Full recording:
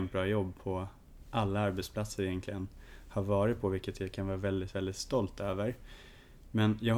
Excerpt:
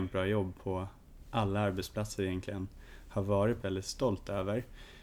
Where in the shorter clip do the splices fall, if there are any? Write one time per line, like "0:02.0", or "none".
0:03.6